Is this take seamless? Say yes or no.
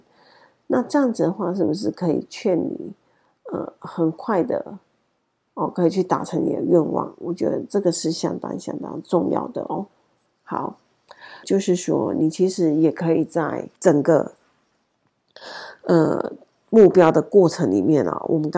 no